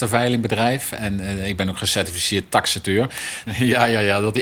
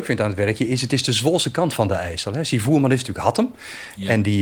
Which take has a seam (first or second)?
first